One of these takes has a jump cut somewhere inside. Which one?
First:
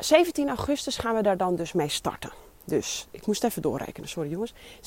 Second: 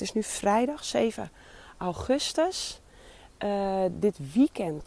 second; 1 cut; at 3.9 s

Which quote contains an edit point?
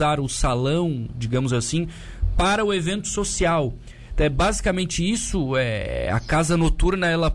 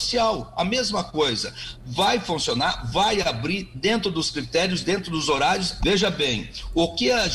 second; 1 cut; at 5.8 s

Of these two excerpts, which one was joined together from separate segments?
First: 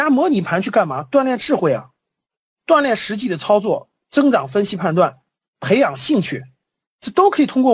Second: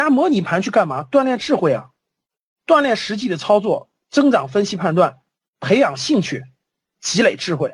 first; 1 cut; at 6.8 s

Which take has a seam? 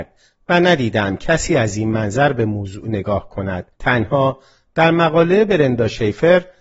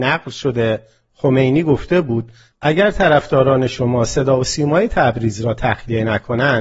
first; 1 cut; at 3.7 s

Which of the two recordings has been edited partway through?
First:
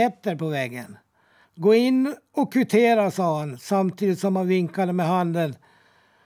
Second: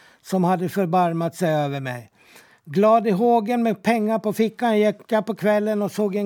first; 1 cut; at 1.4 s

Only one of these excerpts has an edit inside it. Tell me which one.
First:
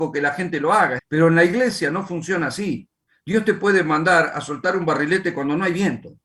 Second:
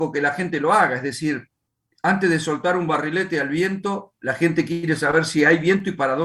first; 1 cut; at 1.0 s

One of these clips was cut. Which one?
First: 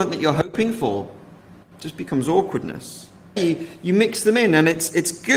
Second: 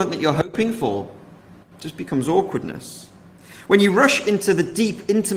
first; 1 cut; at 3.4 s

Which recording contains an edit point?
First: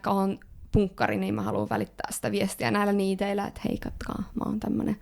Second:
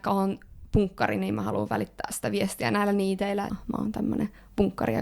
second; 1 cut; at 3.5 s

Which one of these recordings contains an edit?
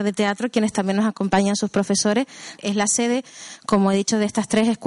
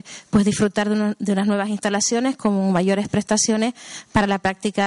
first; 1 cut; at 2.6 s

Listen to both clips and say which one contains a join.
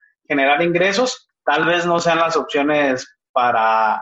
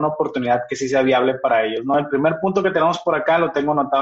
first; 1 cut; at 1.3 s

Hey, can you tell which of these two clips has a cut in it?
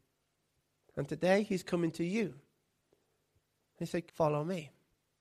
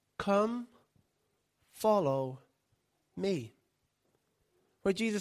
first; 1 cut; at 4.1 s

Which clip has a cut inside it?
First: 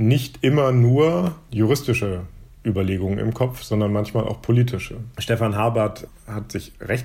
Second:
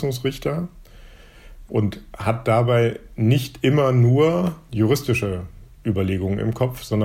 first; 1 cut; at 5.1 s

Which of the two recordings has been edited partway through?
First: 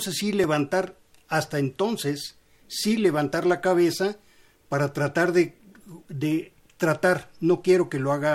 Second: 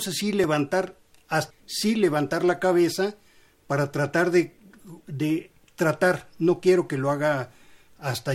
second; 1 cut; at 1.5 s

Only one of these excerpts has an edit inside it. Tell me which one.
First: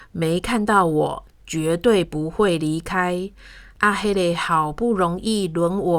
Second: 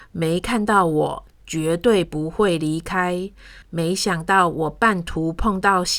second; 1 cut; at 3.6 s

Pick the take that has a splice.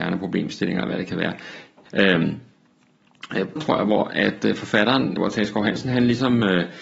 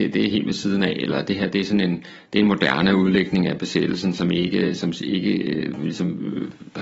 first; 3 cuts; at 1.9 s, 3.6 s, 5.2 s

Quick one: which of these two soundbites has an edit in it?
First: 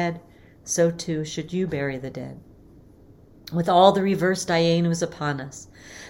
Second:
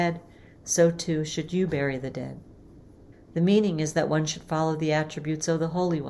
second; 1 cut; at 3.1 s

